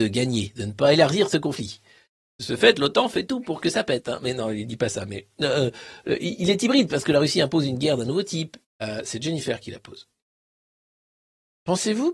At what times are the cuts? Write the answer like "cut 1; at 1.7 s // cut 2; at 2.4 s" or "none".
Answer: cut 1; at 8.6 s